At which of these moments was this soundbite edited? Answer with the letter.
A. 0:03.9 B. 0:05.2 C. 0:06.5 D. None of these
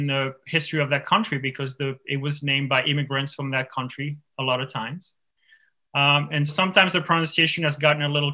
C